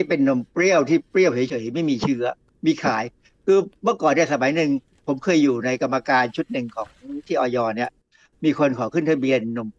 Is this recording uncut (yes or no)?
yes